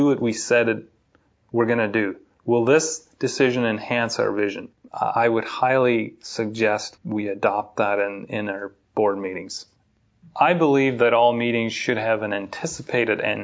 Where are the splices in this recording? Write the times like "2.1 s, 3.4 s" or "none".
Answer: 7.0 s